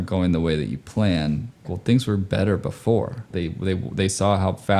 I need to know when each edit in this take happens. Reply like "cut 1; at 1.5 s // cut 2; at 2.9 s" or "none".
cut 1; at 1.6 s // cut 2; at 3.3 s